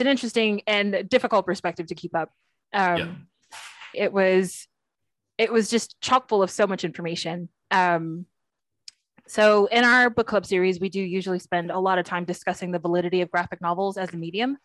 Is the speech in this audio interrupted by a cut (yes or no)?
yes